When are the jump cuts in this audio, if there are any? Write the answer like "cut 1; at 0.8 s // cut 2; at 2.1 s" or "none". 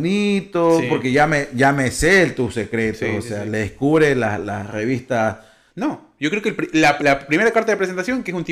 cut 1; at 5.7 s // cut 2; at 7.0 s